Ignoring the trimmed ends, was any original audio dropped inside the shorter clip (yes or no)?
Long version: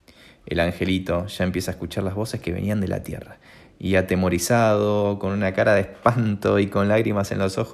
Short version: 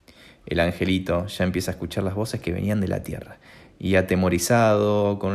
no